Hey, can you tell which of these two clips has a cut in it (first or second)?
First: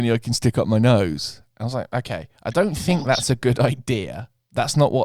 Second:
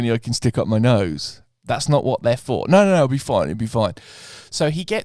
second